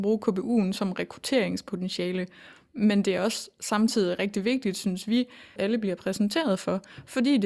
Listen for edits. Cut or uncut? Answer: cut